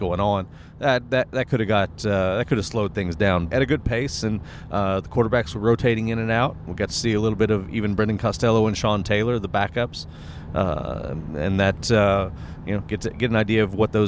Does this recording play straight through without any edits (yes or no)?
no